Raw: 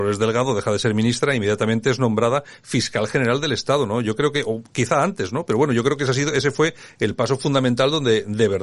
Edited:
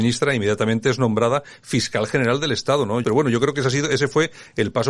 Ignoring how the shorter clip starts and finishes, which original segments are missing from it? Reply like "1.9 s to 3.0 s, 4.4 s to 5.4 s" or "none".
4.0 s to 5.5 s